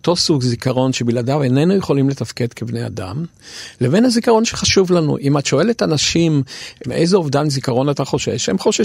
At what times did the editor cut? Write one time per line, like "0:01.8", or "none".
0:06.8